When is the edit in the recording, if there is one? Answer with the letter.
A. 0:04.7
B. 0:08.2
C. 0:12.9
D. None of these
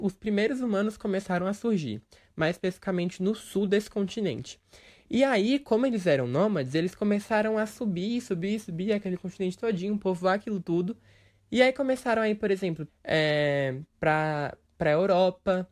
C